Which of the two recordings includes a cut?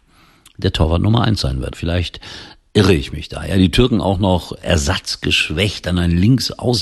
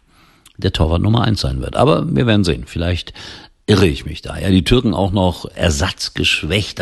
first; 1 cut; at 1.7 s

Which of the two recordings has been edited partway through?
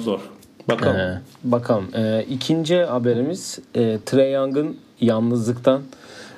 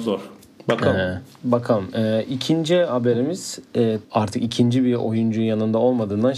second; 1 cut; at 4.0 s

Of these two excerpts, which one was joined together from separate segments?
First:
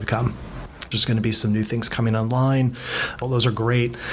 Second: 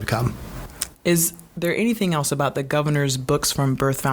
first; 2 cuts; at 0.9 s, 3.2 s

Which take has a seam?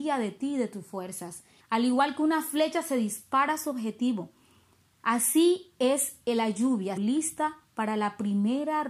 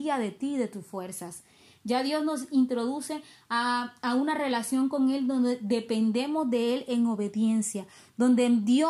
first; 2 cuts; at 1.6 s, 7.0 s

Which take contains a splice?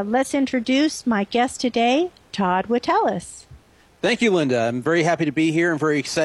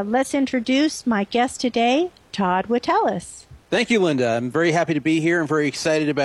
second; 1 cut; at 3.6 s

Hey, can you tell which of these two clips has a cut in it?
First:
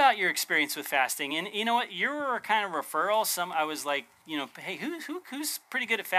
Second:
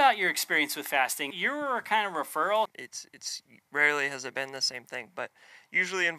second; 2 cuts; at 1.3 s, 2.7 s

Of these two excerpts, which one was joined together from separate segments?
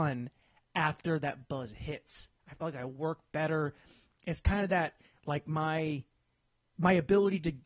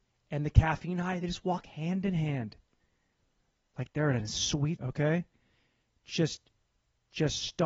second; 1 cut; at 4.8 s

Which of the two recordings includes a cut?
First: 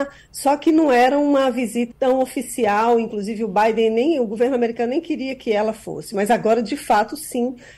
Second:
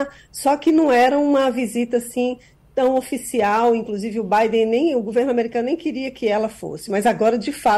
first; 1 cut; at 1.9 s

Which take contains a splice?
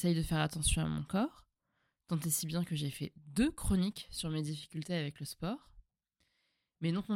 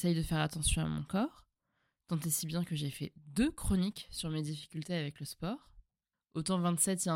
second; 1 cut; at 6.1 s

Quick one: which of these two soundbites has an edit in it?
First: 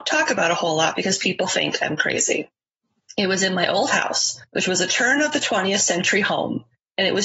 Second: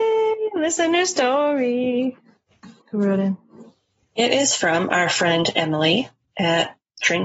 second; 1 cut; at 2.8 s

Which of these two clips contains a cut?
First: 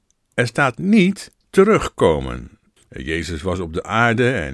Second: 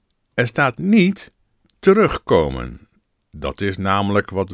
first; 2 cuts; at 1.4 s, 2.8 s

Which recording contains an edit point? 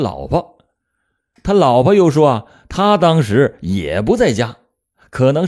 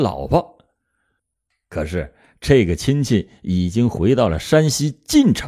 second; 1 cut; at 1.2 s

